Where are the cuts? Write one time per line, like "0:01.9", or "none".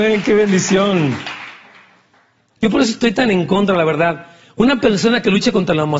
0:02.6